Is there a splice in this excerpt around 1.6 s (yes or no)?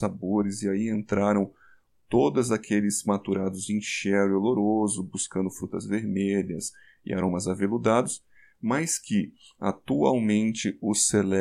no